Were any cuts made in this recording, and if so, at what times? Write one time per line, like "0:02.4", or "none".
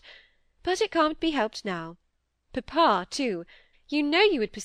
0:03.7